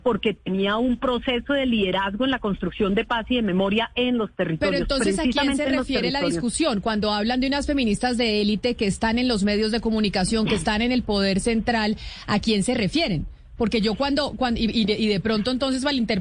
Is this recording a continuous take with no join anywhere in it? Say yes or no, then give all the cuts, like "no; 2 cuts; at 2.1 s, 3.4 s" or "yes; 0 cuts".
yes; 0 cuts